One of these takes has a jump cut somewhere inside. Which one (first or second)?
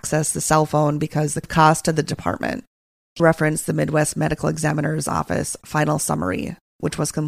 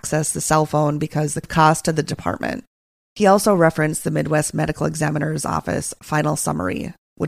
first